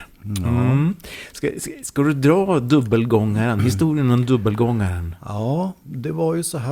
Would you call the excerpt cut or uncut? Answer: uncut